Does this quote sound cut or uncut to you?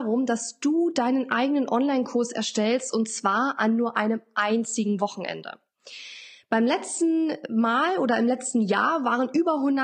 uncut